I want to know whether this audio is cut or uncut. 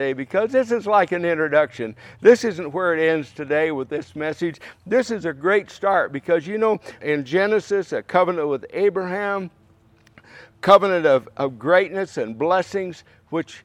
cut